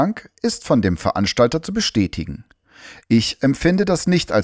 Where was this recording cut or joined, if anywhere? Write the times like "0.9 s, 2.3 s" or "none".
3.0 s

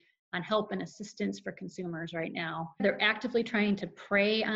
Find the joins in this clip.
2.8 s

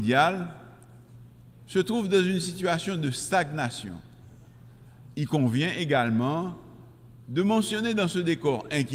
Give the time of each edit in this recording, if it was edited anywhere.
1.6 s, 5.1 s

